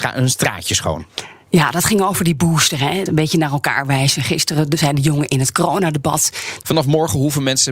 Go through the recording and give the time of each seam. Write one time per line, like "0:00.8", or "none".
0:03.1
0:06.6